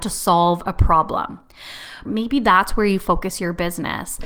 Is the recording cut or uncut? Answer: cut